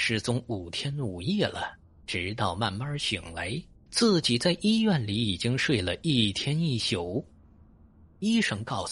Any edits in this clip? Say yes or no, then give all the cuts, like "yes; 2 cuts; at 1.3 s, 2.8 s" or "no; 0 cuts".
yes; 2 cuts; at 2.0 s, 3.9 s